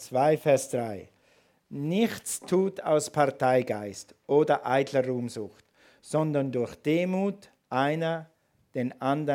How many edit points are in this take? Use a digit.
0